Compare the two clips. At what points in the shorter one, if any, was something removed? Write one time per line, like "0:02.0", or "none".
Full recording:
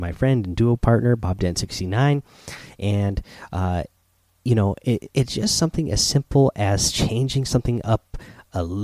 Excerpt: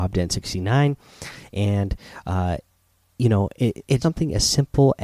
0:04.0